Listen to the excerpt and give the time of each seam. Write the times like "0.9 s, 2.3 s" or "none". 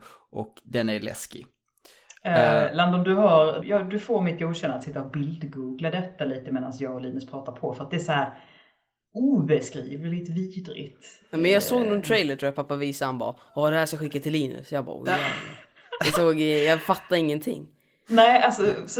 3.6 s